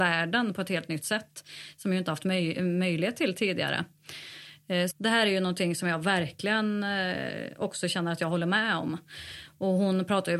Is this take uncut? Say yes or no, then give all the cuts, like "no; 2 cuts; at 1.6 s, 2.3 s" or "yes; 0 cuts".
no; 1 cut; at 4.9 s